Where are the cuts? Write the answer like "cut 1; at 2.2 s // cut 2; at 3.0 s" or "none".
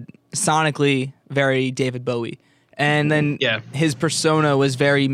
none

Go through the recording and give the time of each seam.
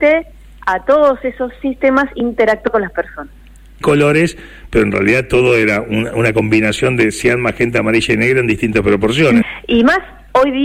cut 1; at 3.8 s // cut 2; at 9.4 s

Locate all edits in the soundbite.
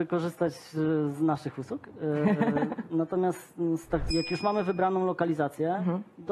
cut 1; at 4.1 s

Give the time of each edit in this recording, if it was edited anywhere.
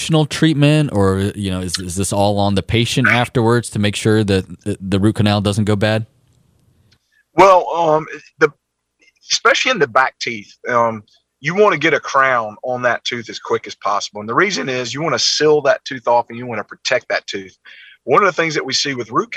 none

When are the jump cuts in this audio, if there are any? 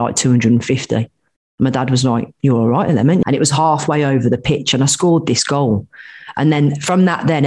cut 1; at 3.2 s

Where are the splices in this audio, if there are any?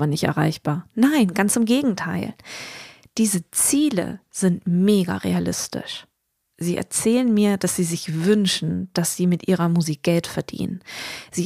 cut 1; at 6.5 s

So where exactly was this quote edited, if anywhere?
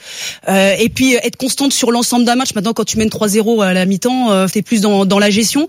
cut 1; at 4.5 s

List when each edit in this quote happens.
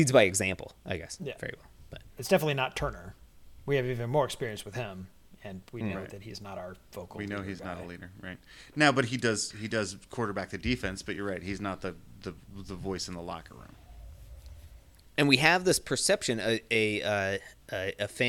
cut 1; at 2.2 s

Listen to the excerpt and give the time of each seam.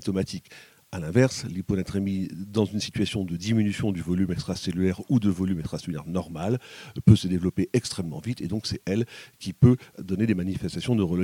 none

